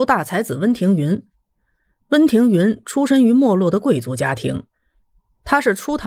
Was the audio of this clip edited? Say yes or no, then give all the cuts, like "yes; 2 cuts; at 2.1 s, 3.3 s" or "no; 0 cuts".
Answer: no; 0 cuts